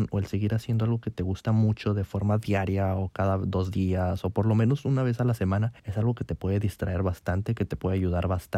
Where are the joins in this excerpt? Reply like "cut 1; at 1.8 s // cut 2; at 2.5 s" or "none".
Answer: cut 1; at 5.8 s